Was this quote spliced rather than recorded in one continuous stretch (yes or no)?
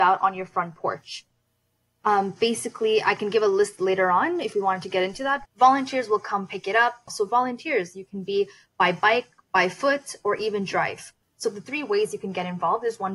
yes